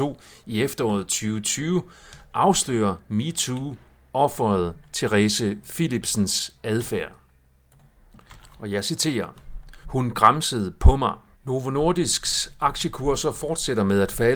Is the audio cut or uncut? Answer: cut